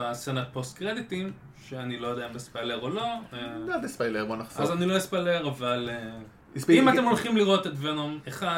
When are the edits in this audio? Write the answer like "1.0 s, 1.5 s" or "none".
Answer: none